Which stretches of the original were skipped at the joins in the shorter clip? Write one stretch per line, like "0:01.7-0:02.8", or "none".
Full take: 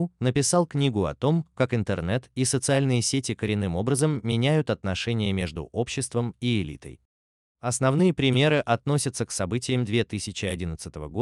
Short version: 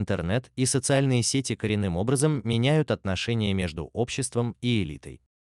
none